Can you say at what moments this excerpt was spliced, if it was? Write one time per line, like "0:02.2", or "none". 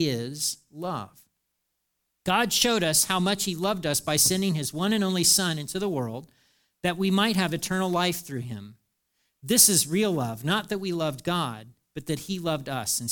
none